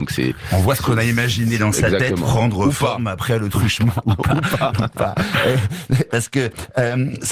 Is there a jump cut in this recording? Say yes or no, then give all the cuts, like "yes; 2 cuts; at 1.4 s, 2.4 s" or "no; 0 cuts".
no; 0 cuts